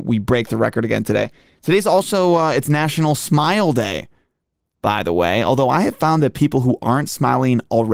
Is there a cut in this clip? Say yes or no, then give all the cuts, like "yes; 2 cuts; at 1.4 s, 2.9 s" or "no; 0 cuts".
no; 0 cuts